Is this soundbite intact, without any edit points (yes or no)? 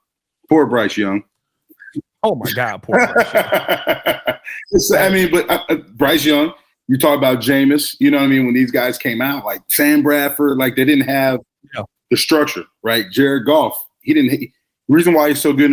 yes